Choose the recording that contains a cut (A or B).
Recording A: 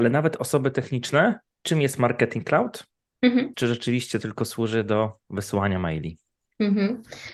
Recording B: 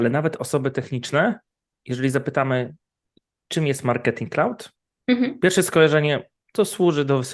A